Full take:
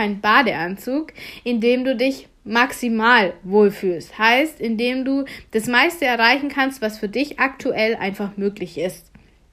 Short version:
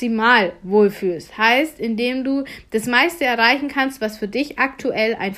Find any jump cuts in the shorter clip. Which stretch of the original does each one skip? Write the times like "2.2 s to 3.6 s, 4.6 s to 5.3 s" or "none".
none